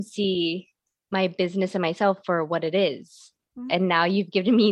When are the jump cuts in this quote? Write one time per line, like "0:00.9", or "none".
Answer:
0:03.7